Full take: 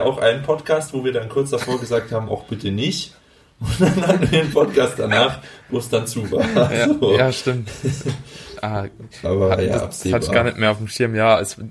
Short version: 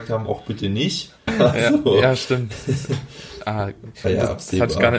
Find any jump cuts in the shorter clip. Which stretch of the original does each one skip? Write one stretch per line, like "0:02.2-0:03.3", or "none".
0:03.3-0:06.4
0:09.2-0:09.6

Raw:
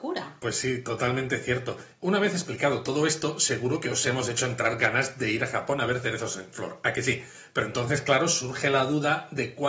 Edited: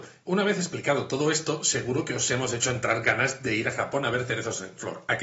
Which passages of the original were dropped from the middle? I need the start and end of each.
none

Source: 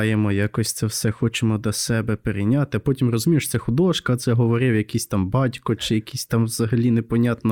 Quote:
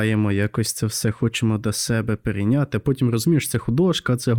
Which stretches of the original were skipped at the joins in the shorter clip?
none

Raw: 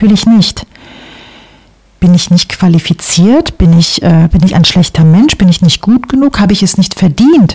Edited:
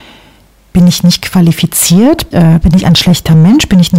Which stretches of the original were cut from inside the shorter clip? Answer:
0:03.6-0:04.0

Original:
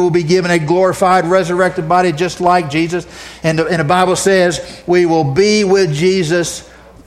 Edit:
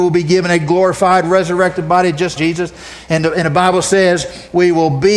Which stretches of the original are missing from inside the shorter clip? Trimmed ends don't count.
0:02.4-0:02.7

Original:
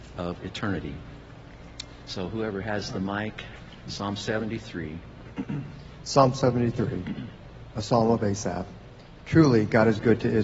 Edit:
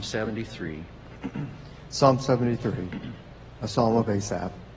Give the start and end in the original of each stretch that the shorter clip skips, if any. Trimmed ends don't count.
none

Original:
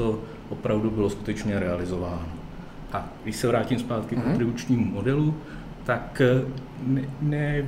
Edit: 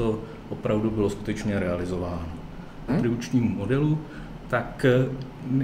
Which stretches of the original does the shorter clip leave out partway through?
0:02.9-0:04.2

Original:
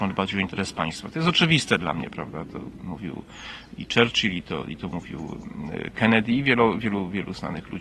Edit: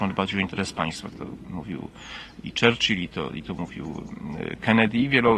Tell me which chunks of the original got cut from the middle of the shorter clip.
0:01.1-0:02.5

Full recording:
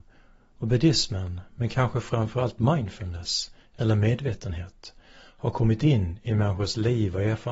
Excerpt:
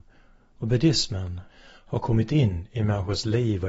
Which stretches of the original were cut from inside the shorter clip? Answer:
0:01.5-0:05.0

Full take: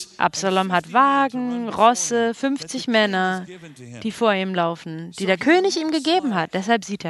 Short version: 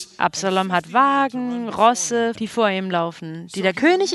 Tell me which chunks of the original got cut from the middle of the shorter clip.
0:02.3-0:04.0

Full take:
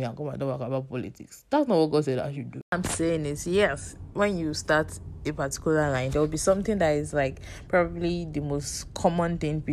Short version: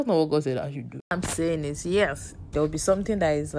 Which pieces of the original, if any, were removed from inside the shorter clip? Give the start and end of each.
0:04.1-0:06.1

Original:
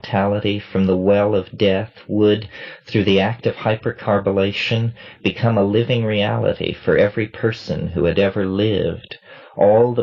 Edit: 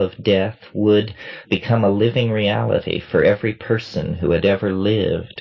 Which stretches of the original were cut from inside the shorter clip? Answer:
0:02.8-0:05.2

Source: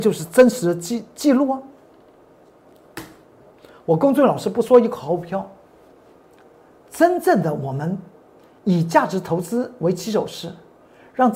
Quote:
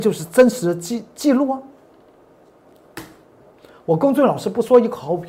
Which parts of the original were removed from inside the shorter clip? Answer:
none

